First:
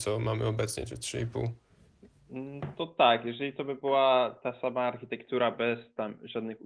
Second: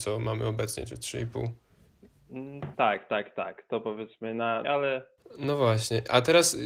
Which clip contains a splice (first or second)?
second